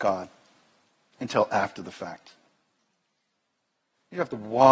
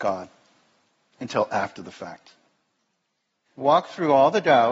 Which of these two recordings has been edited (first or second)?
second